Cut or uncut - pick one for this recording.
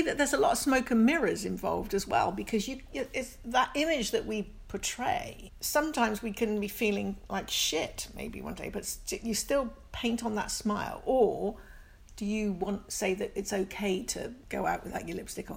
uncut